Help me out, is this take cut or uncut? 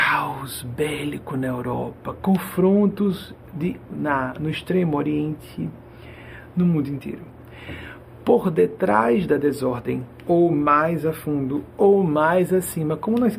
cut